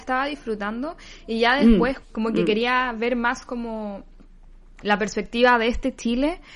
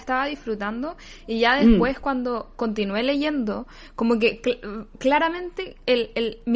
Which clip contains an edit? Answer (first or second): first